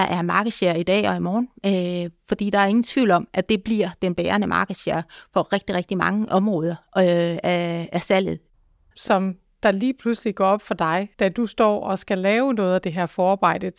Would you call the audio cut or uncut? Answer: cut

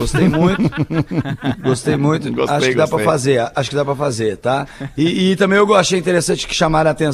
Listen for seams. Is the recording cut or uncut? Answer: uncut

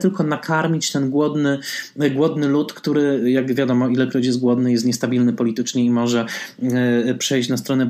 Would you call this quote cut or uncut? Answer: uncut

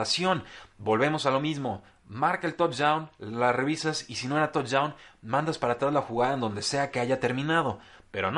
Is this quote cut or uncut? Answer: uncut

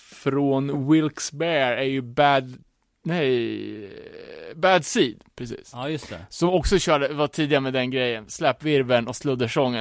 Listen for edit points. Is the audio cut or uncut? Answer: uncut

